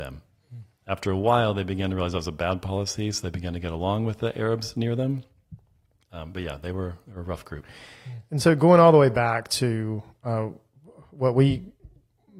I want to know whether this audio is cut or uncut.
uncut